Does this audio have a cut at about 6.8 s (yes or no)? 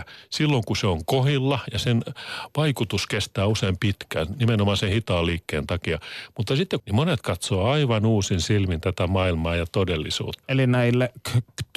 yes